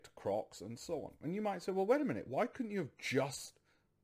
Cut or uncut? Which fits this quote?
uncut